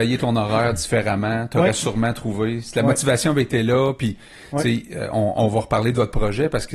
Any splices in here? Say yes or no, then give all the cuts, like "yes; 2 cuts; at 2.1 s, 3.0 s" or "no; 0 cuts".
no; 0 cuts